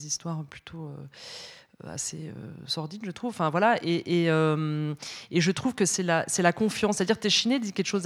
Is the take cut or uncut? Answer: uncut